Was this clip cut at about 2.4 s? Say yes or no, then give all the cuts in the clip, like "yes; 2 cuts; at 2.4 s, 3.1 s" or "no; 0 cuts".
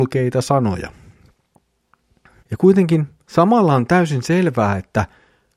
yes; 1 cut; at 2.4 s